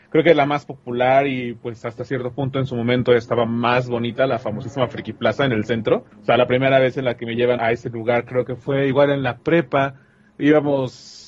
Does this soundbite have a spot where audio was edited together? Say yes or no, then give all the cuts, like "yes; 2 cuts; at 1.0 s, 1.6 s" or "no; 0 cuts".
yes; 2 cuts; at 6.1 s, 7.6 s